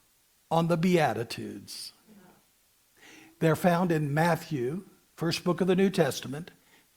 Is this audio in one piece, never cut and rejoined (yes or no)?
yes